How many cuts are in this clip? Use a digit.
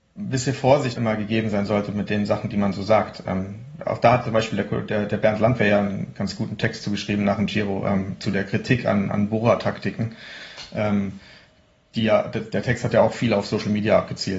1